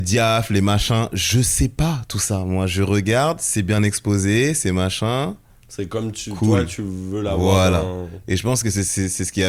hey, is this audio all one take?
yes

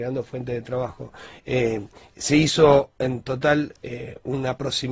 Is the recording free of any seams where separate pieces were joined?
yes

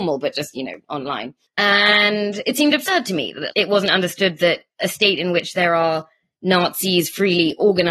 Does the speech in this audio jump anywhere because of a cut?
yes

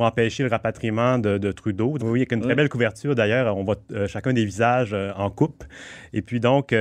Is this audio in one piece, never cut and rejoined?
no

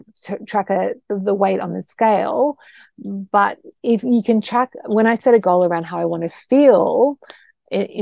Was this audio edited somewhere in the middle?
no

